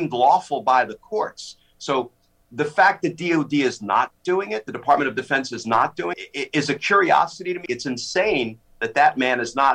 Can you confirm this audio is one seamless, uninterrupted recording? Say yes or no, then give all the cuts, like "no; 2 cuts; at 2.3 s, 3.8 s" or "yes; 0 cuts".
no; 2 cuts; at 6.1 s, 7.7 s